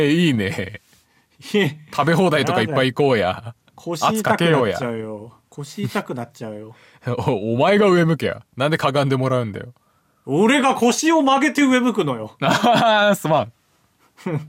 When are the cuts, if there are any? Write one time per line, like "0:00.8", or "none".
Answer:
none

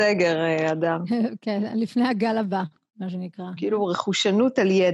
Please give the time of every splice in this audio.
0:03.6

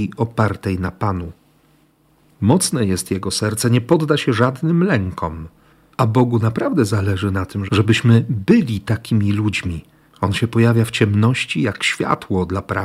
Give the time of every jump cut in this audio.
0:05.9
0:07.7
0:10.1

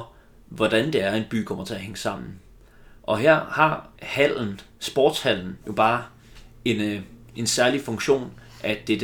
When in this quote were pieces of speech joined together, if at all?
none

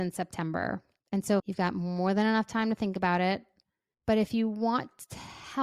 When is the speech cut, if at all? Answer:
0:01.4
0:03.9

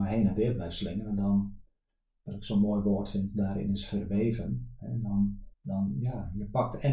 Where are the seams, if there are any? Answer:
0:05.5

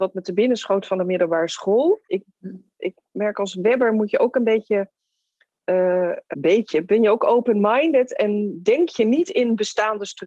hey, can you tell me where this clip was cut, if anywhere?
0:02.1
0:06.3

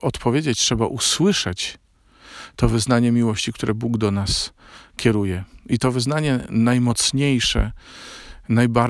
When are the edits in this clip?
none

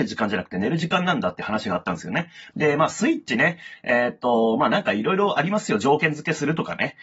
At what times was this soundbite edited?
0:02.5

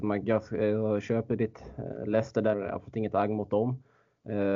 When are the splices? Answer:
0:02.5

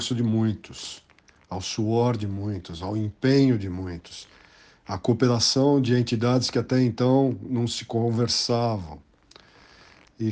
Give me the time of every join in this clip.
none

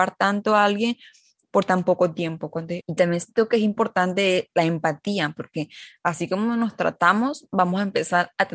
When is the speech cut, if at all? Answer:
0:02.8

